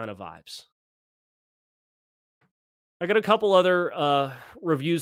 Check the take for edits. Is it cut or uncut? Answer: uncut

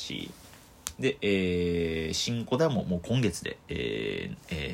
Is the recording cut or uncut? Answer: uncut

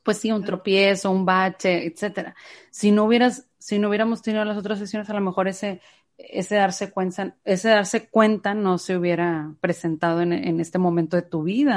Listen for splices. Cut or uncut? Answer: uncut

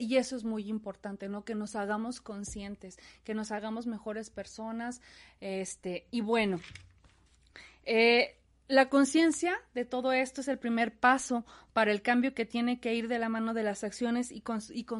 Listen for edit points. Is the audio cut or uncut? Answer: uncut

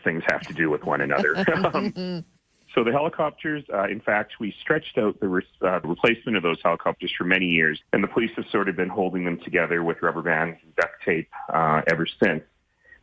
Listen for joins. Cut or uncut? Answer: cut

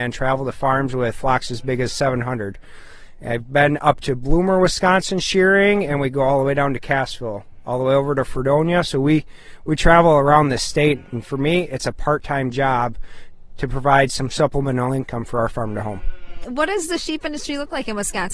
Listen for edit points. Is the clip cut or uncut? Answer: uncut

